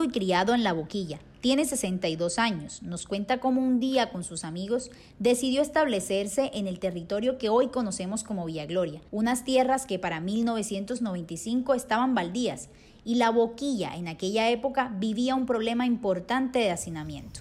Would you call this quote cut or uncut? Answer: cut